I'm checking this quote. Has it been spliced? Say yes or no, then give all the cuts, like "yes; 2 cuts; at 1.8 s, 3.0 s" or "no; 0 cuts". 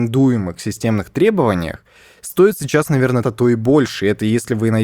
yes; 1 cut; at 3.2 s